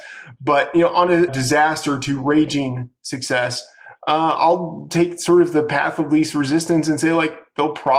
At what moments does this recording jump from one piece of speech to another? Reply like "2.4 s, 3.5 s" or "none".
1.3 s